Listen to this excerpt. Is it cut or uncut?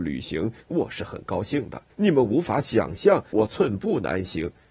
cut